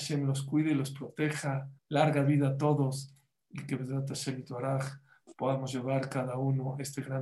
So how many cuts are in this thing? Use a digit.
1